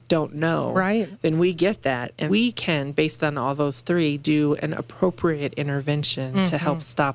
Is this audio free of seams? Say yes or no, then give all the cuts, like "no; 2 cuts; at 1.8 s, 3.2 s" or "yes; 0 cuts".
no; 2 cuts; at 1.2 s, 2.3 s